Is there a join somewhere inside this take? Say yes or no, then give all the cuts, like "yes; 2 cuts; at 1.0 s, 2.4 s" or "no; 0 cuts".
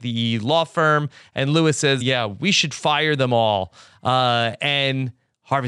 yes; 1 cut; at 2.0 s